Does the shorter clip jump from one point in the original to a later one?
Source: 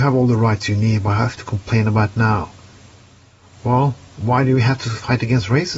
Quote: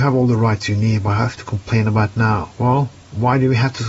yes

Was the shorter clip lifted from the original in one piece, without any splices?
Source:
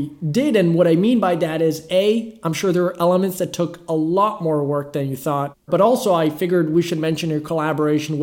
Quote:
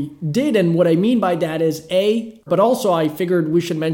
no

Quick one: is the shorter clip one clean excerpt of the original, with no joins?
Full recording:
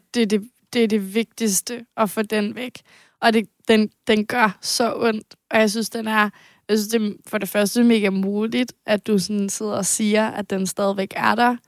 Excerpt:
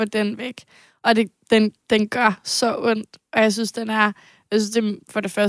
yes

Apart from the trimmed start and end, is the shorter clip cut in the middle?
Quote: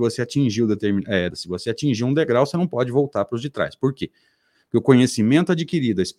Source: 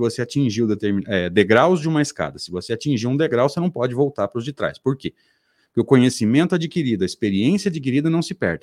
yes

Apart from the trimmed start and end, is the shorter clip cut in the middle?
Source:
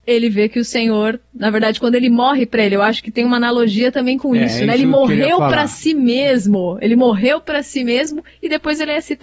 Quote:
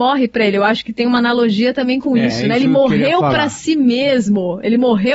no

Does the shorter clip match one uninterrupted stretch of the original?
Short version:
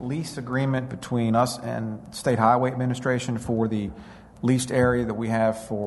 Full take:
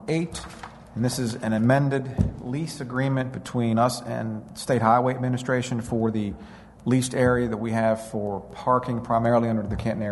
yes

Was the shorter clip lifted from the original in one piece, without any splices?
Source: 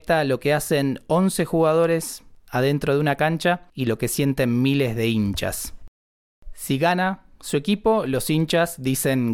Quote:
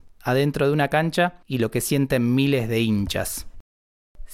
yes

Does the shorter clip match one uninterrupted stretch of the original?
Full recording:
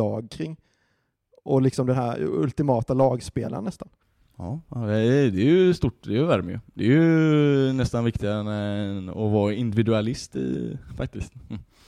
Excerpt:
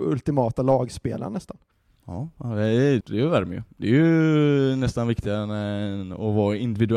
no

